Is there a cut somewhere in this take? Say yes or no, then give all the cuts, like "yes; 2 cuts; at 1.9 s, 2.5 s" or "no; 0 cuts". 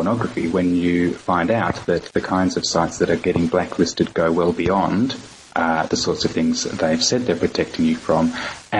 no; 0 cuts